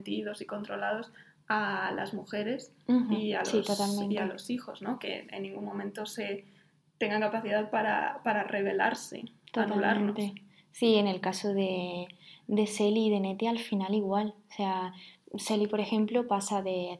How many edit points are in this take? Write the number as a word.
zero